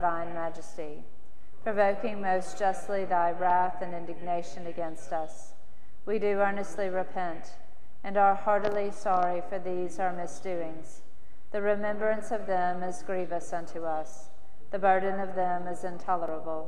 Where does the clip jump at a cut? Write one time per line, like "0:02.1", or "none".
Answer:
none